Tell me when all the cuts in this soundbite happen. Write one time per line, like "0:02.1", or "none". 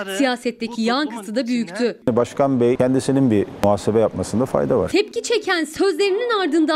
0:02.0